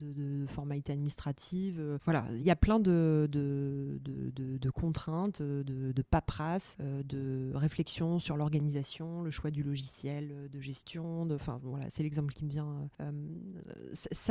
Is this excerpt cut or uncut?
cut